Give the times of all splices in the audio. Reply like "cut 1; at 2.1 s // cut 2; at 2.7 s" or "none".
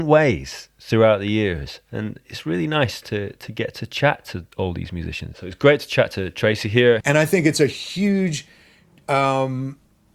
cut 1; at 5.3 s // cut 2; at 7.0 s